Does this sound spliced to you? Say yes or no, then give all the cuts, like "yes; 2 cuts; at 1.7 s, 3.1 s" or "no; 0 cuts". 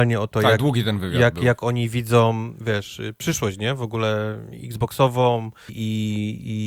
yes; 1 cut; at 5.7 s